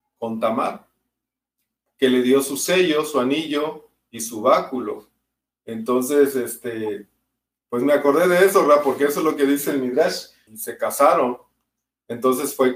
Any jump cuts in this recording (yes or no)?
yes